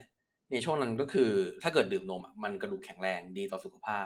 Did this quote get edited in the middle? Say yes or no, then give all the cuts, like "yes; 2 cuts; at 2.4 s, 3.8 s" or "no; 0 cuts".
no; 0 cuts